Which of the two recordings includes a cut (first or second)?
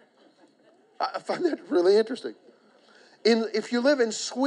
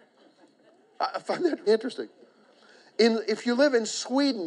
second